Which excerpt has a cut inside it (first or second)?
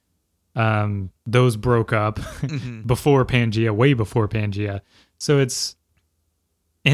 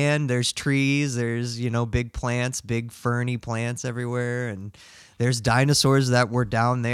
first